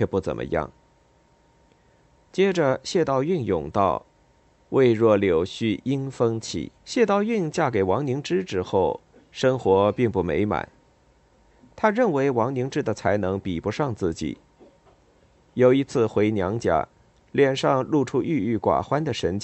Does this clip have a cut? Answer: yes; 1 cut; at 6.8 s

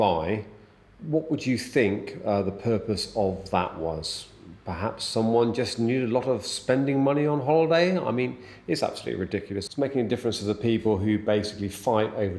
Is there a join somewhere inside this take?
yes; 1 cut; at 9.7 s

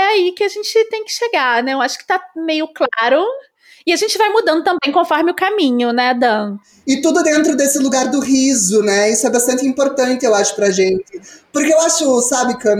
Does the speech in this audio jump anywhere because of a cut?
no; 0 cuts

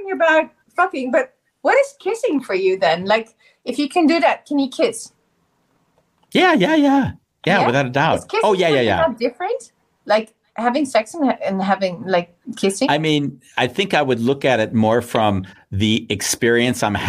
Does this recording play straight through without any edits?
yes; 0 cuts

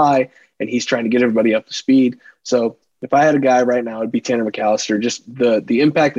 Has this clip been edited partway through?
no; 0 cuts

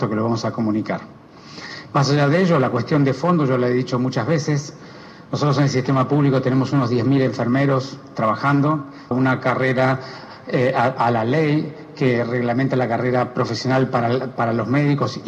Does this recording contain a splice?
yes; 1 cut; at 9.1 s

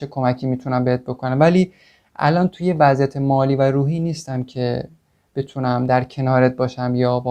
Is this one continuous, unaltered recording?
yes; 0 cuts

